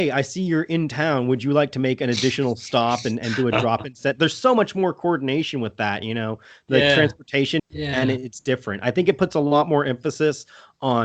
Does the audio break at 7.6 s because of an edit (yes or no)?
yes